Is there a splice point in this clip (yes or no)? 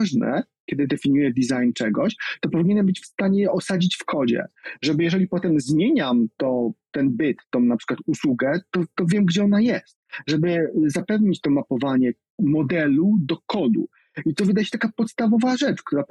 no